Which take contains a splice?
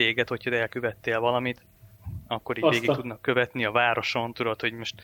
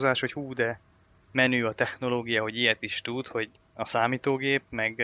second; 1 cut; at 3.6 s

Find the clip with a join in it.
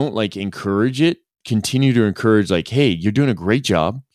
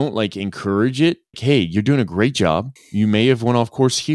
second; 2 cuts; at 1.3 s, 2.8 s

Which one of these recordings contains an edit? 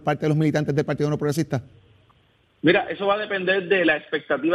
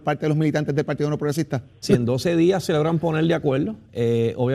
second; 1 cut; at 1.8 s

